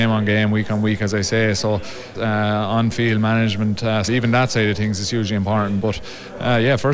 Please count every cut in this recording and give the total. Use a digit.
2